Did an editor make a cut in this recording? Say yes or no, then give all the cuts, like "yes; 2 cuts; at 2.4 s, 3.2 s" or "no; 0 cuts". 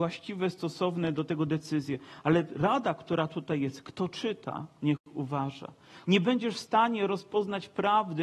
yes; 1 cut; at 6.0 s